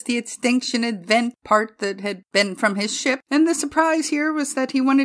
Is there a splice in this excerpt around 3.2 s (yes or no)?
yes